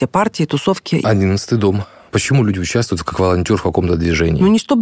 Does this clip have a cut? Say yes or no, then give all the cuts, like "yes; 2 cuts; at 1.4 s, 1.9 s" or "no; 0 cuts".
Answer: yes; 1 cut; at 1.0 s